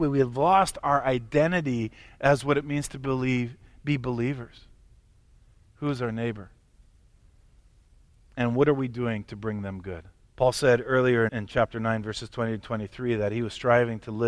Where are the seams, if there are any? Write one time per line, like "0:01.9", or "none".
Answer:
0:05.7
0:10.2
0:11.3